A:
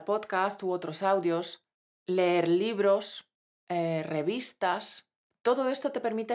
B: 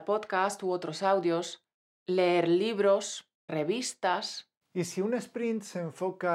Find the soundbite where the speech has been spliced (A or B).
B